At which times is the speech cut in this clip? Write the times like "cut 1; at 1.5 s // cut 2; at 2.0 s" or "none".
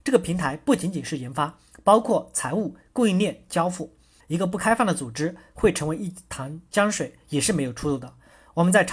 cut 1; at 4.2 s